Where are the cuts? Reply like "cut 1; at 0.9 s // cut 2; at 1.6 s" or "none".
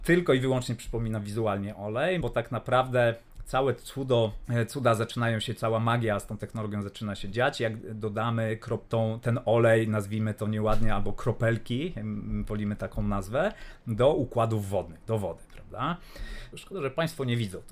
cut 1; at 2.2 s // cut 2; at 16.5 s